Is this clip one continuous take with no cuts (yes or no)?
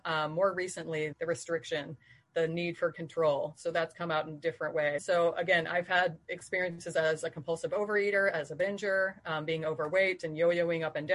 no